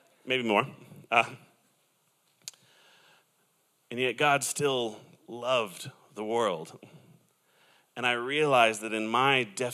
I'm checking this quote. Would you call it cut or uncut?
uncut